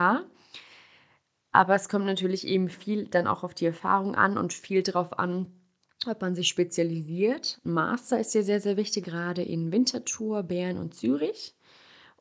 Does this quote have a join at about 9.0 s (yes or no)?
yes